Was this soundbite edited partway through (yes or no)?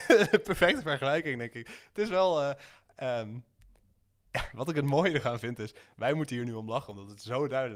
no